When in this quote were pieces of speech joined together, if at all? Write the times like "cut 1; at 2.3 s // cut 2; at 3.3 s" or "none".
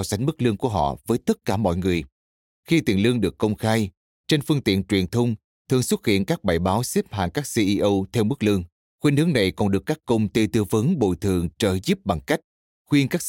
cut 1; at 2.5 s // cut 2; at 8.9 s

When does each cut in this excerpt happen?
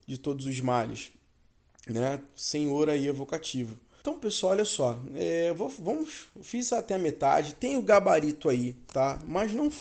cut 1; at 4.0 s

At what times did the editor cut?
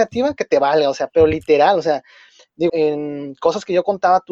cut 1; at 2.7 s

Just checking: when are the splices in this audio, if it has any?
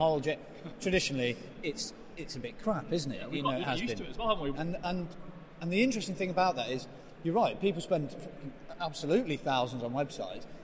cut 1; at 4.5 s

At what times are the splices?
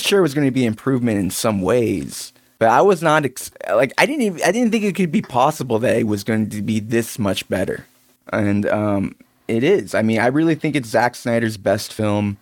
none

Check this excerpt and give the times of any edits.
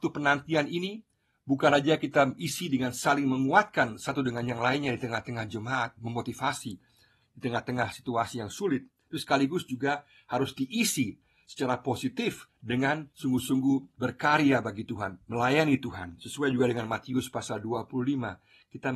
none

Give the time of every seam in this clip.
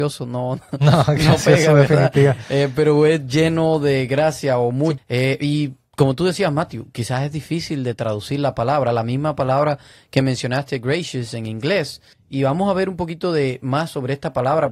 cut 1; at 5.0 s // cut 2; at 12.1 s

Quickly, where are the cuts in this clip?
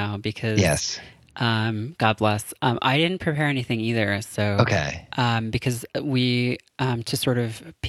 none

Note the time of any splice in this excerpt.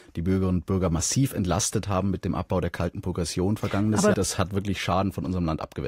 cut 1; at 4.1 s

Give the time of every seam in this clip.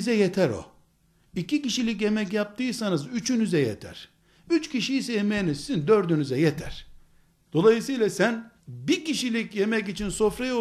cut 1; at 7.5 s // cut 2; at 8.6 s

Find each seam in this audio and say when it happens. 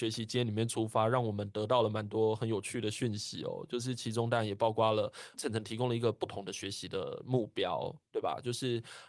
none

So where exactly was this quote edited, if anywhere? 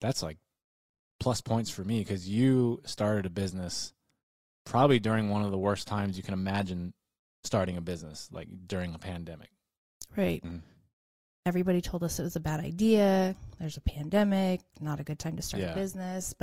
cut 1; at 10.4 s

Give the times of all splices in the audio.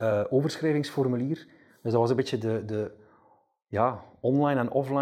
none

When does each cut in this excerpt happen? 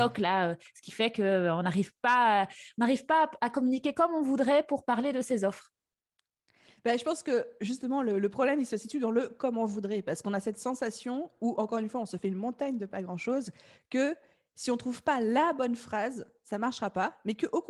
none

